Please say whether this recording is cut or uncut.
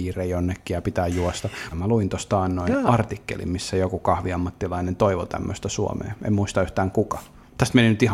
cut